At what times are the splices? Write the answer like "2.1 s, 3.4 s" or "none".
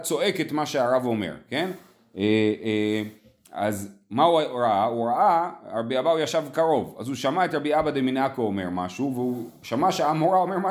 none